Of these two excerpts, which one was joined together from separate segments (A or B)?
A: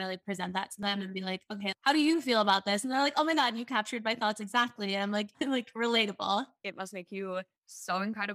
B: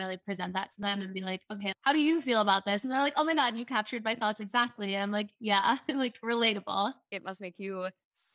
A